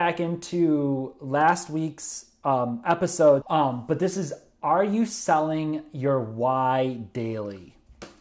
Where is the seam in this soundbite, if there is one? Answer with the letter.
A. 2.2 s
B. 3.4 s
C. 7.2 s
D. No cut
B